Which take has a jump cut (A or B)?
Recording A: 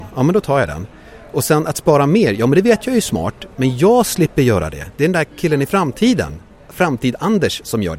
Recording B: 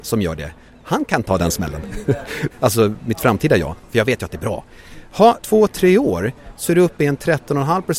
B